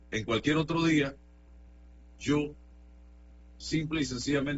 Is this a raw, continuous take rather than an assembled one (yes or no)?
yes